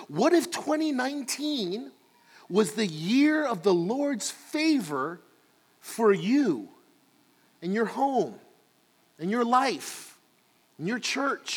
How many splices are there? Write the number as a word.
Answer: zero